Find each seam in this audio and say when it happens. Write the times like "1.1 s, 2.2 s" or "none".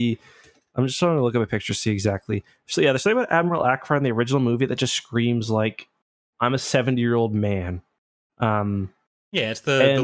none